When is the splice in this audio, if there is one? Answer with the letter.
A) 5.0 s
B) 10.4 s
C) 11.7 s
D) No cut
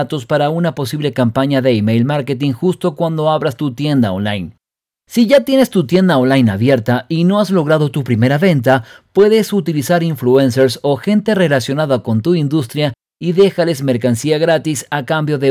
D